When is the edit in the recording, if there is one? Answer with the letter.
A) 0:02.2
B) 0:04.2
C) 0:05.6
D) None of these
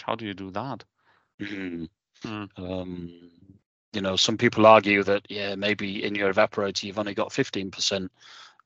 A